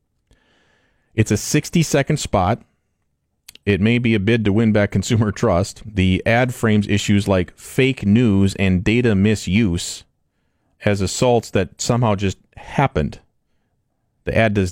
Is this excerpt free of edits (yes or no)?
yes